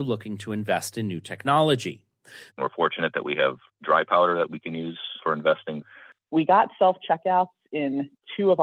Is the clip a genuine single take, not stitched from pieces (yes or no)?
no